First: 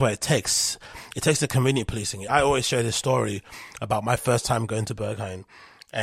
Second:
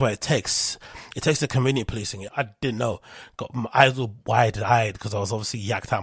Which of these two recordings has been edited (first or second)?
second